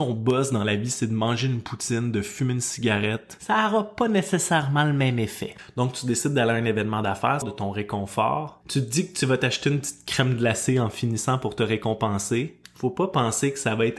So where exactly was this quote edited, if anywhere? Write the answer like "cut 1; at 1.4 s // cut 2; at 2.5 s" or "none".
cut 1; at 7.4 s

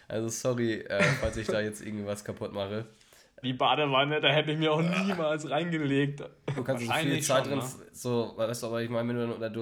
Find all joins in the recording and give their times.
cut 1; at 3.4 s // cut 2; at 6.6 s

